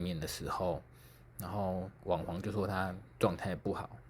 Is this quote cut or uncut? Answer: uncut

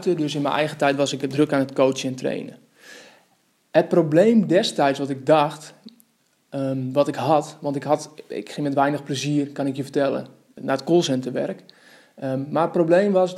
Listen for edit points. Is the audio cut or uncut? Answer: cut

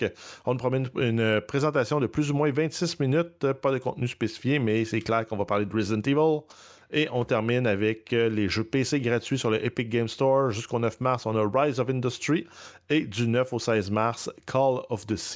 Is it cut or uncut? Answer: uncut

